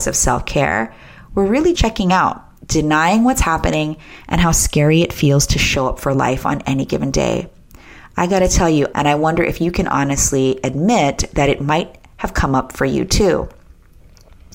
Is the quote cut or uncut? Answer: cut